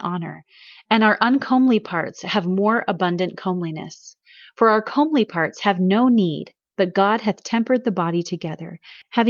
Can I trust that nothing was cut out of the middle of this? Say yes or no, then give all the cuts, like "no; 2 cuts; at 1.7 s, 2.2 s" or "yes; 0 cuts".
yes; 0 cuts